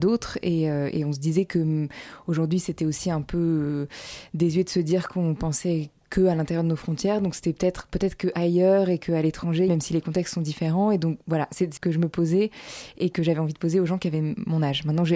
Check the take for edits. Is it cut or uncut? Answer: cut